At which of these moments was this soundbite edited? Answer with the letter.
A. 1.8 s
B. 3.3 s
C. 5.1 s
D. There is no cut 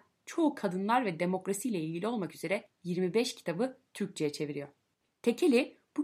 C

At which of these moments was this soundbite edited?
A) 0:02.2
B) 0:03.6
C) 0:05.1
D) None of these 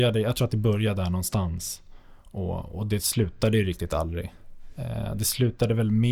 D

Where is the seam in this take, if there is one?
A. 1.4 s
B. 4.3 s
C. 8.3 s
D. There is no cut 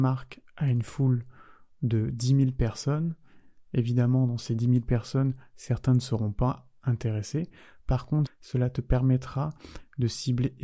C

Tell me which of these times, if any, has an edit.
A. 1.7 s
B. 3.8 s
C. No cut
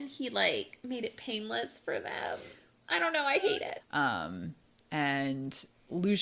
B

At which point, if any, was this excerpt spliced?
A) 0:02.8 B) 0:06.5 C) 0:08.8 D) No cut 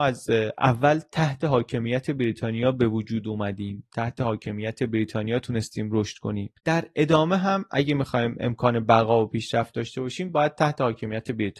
B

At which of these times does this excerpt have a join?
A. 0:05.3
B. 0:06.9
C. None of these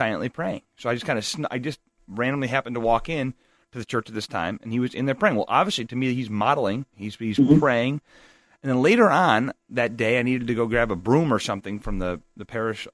B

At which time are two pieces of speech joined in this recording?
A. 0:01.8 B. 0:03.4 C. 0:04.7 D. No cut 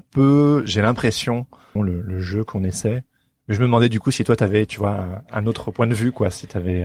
A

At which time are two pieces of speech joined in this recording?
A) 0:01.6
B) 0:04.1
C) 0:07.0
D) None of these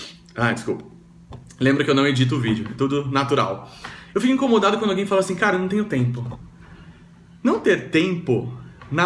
D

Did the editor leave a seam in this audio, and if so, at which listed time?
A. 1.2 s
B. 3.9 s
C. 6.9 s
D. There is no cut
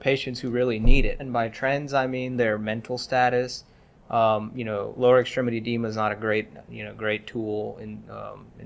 A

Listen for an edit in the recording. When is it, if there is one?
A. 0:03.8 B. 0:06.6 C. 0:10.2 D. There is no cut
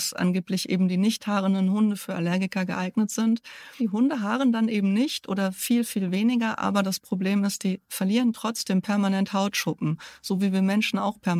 A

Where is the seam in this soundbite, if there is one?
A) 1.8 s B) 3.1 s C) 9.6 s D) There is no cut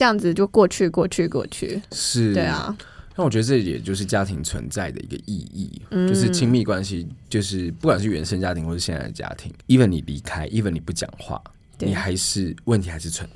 C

